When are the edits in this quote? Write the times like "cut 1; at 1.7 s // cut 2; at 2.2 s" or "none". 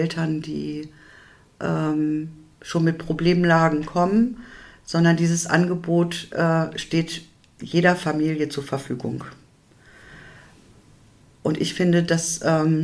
none